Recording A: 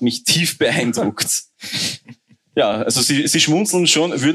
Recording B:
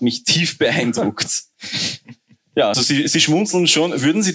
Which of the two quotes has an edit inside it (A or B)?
B